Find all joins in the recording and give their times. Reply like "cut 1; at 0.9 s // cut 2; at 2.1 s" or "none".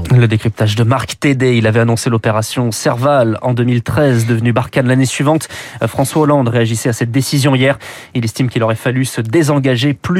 none